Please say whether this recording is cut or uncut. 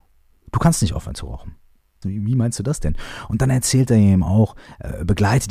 cut